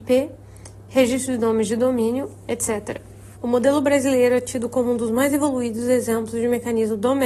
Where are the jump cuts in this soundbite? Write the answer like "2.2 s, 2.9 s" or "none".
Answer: 3.3 s